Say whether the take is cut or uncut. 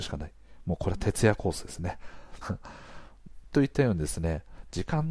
cut